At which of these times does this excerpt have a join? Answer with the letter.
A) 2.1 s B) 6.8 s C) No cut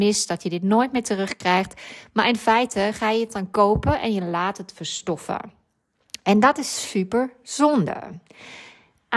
B